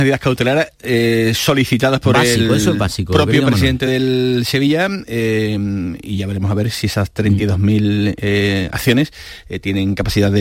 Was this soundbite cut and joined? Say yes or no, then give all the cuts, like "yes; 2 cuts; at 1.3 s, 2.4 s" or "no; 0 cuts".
no; 0 cuts